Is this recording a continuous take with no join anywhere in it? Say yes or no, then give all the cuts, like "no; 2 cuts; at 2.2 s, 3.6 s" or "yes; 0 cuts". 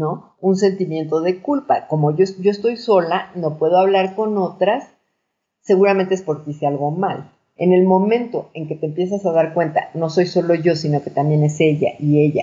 yes; 0 cuts